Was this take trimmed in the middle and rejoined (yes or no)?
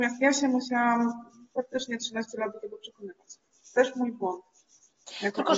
no